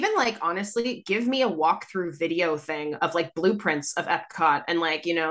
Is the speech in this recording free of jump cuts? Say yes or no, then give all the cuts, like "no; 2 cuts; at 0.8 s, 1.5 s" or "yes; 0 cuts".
yes; 0 cuts